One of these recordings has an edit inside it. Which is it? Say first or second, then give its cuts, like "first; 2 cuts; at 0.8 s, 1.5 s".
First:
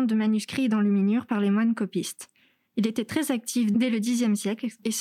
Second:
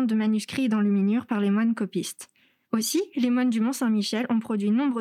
second; 1 cut; at 2.6 s